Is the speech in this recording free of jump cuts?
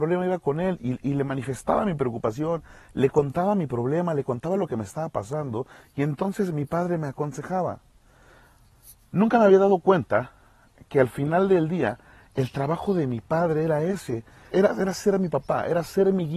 no; 1 cut; at 14.5 s

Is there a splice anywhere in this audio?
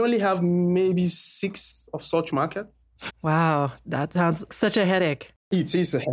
yes; 2 cuts; at 3.1 s, 4.5 s

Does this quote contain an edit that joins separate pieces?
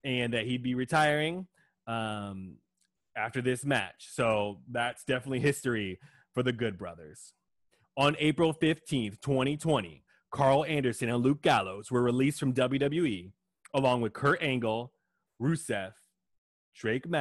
no; 0 cuts

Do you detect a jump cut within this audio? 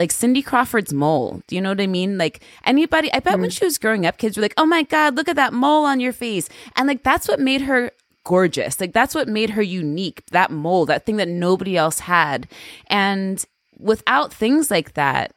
no; 0 cuts

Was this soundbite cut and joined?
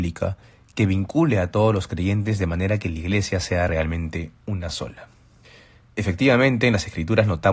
no; 0 cuts

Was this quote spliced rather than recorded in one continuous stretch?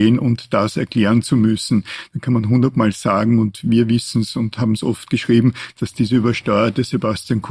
no; 0 cuts

